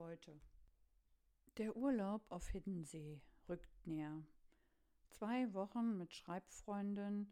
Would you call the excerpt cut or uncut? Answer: uncut